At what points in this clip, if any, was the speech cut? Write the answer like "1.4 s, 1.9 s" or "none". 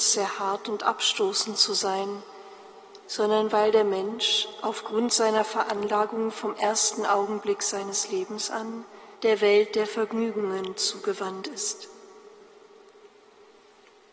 3.0 s, 9.1 s

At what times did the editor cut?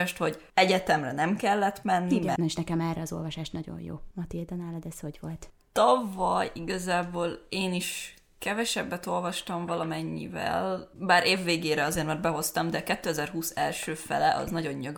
2.4 s

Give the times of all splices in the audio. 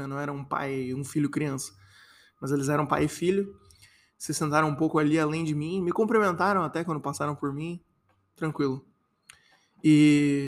none

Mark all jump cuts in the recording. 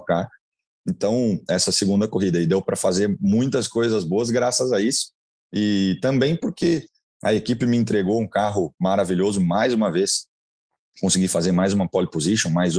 1.5 s

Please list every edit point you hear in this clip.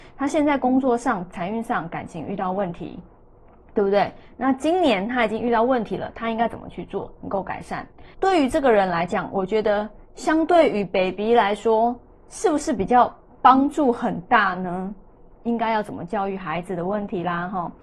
8.1 s, 15.3 s

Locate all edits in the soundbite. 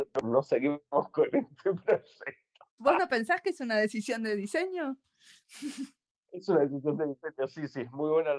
none

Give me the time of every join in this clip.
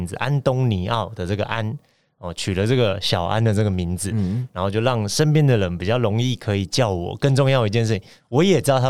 none

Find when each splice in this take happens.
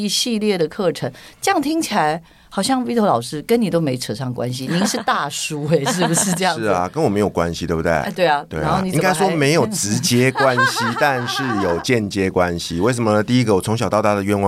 none

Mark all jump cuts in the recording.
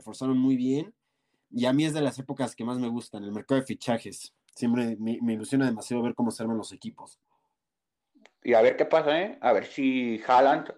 none

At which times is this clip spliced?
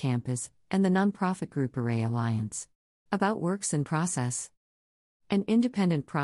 3.1 s

